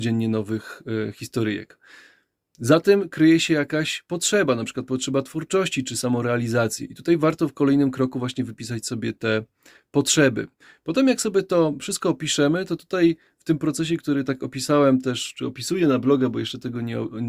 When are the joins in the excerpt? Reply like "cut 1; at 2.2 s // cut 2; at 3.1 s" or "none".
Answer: none